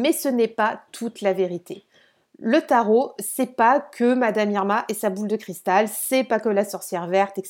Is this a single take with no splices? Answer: yes; 0 cuts

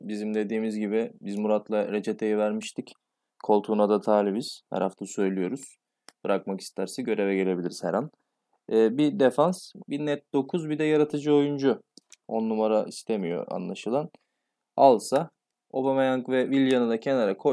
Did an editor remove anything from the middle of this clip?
yes; 1 cut; at 12.2 s

